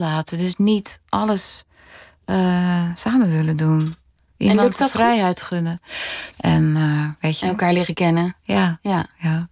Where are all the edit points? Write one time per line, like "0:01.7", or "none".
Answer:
0:06.3